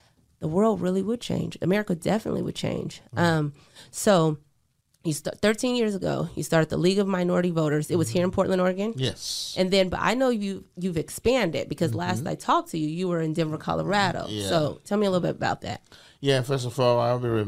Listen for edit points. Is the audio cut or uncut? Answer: uncut